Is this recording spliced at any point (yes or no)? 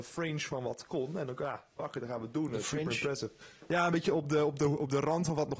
no